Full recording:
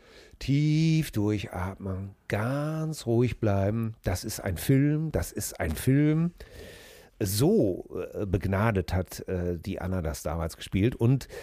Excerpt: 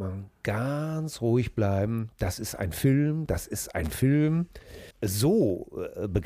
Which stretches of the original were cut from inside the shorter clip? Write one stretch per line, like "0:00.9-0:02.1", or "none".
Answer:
0:06.8-0:07.1